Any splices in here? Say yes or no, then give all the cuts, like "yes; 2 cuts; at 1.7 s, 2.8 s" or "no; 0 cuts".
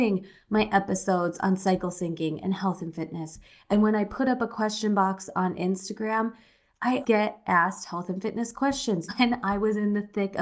yes; 2 cuts; at 7.0 s, 9.1 s